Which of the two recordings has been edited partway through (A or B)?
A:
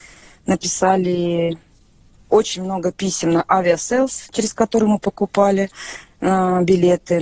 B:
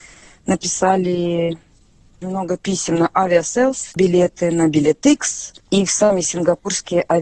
B